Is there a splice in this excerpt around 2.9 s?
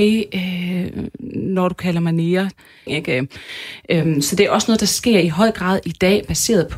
yes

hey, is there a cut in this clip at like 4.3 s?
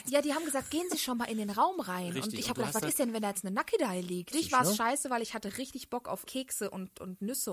yes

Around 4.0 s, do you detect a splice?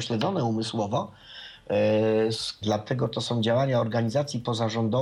no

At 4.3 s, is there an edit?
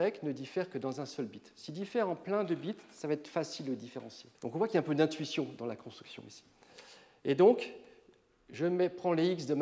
yes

